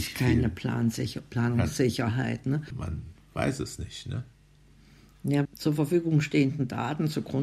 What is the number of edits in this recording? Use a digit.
2